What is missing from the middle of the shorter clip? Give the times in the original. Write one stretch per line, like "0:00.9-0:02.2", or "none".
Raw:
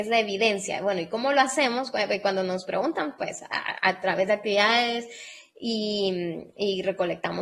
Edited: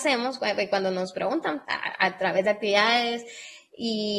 0:03.2-0:03.5